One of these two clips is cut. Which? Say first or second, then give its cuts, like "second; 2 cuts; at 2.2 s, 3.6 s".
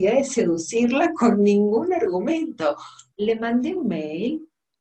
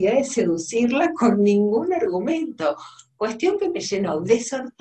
first; 1 cut; at 3.1 s